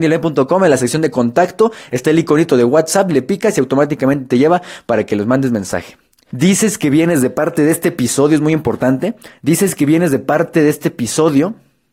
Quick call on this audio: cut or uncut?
cut